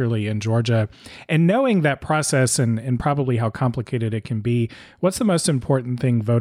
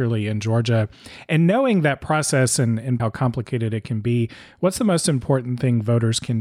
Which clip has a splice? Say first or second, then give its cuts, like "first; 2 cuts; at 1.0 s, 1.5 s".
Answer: second; 1 cut; at 3.0 s